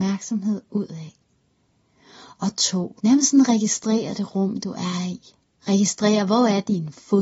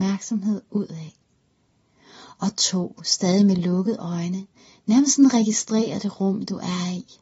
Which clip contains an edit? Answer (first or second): first